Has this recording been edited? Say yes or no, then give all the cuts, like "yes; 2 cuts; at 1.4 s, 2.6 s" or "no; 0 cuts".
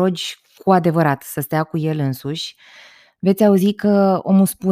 no; 0 cuts